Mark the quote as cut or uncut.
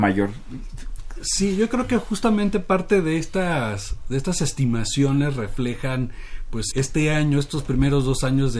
cut